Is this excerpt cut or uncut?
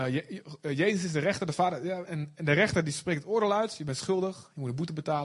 cut